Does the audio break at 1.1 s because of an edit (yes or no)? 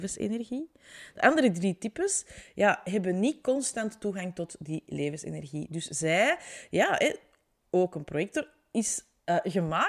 no